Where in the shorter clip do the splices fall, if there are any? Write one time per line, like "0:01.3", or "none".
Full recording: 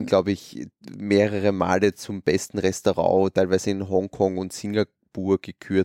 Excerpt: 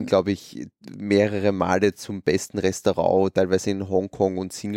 none